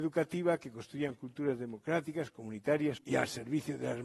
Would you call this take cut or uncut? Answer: cut